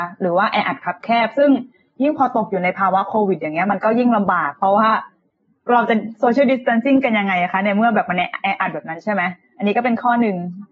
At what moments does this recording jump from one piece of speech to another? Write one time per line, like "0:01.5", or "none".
none